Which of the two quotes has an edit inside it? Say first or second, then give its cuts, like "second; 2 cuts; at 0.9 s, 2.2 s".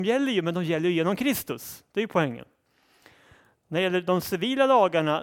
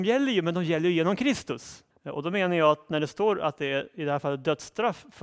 second; 1 cut; at 1.9 s